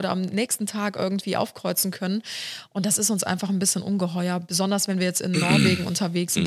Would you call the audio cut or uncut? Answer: uncut